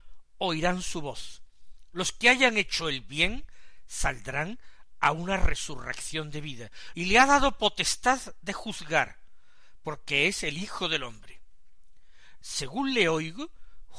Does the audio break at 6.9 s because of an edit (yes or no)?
yes